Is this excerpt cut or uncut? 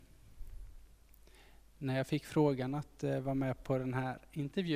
cut